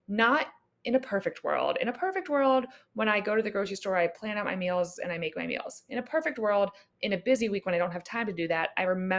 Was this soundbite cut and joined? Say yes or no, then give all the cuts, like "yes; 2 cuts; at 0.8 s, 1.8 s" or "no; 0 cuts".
no; 0 cuts